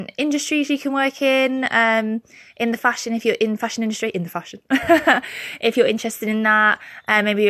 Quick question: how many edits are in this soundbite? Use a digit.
0